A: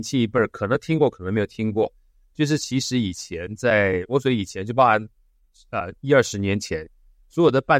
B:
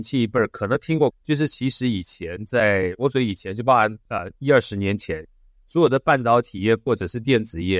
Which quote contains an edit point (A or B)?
B